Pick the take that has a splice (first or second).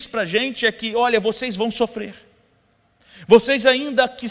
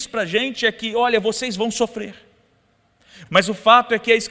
second